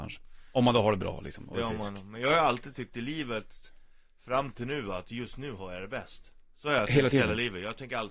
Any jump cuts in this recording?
no; 0 cuts

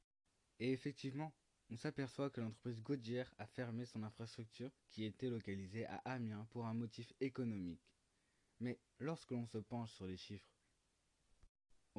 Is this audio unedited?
no; 1 cut; at 4.8 s

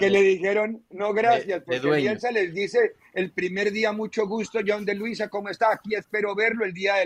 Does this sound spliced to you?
no; 0 cuts

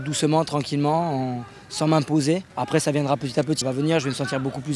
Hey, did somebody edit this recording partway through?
yes; 2 cuts; at 2.5 s, 3.6 s

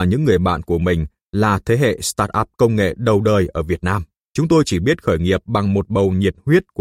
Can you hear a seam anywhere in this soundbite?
yes; 1 cut; at 4.3 s

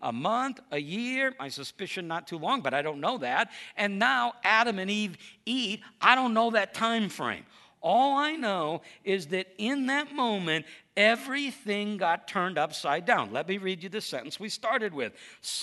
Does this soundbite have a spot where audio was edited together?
no; 0 cuts

